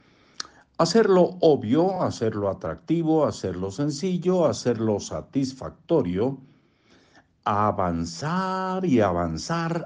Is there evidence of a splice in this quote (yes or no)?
no